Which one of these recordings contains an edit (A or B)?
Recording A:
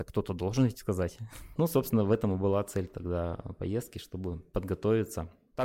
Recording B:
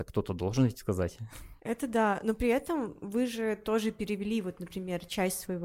A